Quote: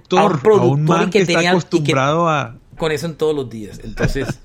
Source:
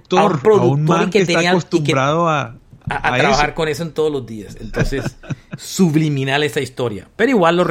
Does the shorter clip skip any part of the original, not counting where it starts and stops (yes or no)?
yes